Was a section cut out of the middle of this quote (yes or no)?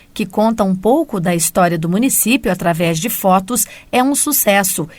no